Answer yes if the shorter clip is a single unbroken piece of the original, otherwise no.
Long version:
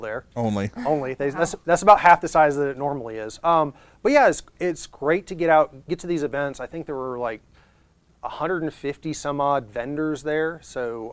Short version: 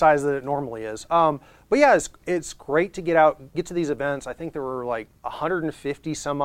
no